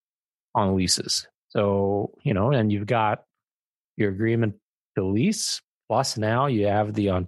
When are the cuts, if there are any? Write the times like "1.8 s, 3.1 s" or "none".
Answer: 1.4 s